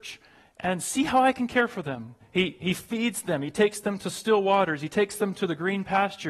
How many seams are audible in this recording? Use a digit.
1